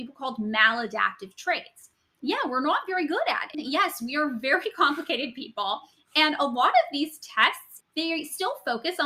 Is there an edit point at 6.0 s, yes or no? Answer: no